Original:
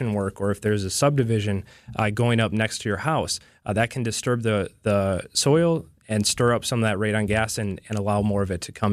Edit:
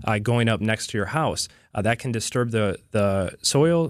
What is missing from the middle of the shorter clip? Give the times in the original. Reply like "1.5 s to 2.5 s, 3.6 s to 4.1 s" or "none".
none